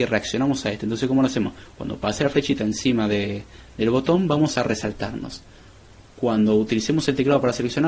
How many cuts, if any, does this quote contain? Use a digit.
0